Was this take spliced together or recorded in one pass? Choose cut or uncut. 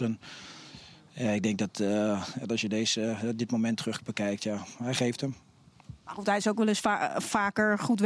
cut